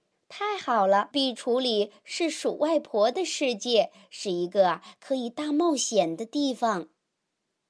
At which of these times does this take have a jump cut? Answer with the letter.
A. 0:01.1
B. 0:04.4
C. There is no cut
A